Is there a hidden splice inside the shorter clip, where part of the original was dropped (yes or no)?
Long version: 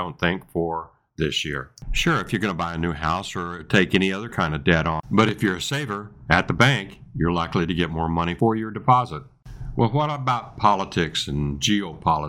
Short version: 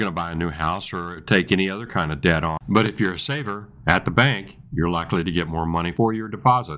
no